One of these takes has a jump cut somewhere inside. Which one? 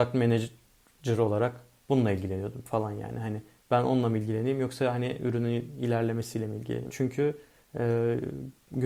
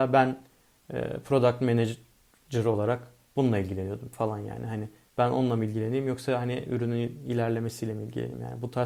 first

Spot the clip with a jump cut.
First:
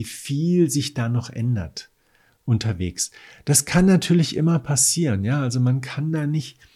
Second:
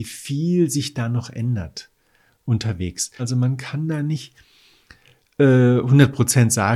second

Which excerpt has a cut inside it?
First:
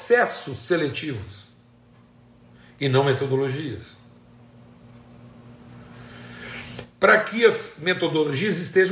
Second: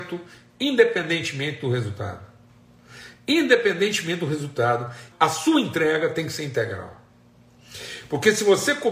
second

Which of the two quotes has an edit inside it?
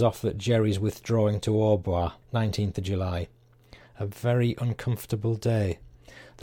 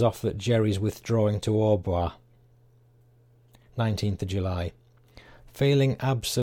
first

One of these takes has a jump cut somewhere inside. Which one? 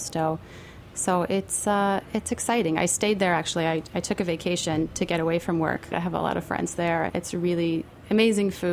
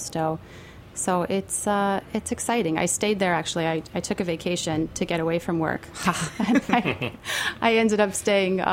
first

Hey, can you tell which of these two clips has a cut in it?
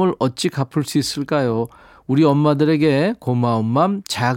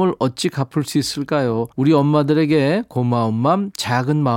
second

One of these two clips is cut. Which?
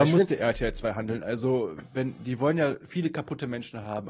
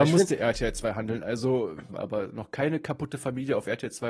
second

